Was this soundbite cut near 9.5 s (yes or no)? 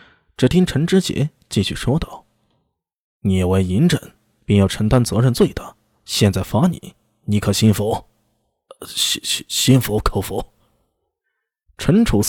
yes